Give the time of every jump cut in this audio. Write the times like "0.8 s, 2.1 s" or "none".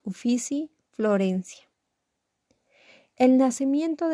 none